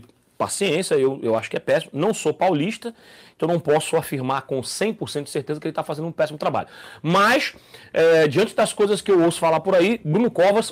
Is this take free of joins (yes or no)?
yes